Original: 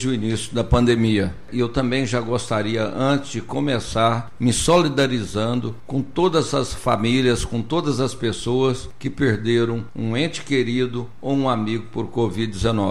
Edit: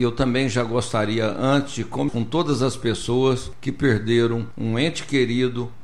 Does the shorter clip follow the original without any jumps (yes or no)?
no